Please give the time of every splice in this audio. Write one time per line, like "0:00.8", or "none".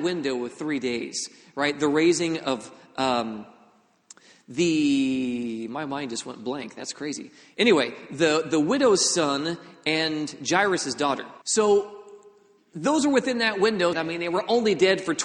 0:11.4
0:13.9